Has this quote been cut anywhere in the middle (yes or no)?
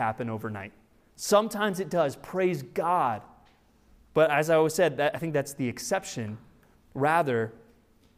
no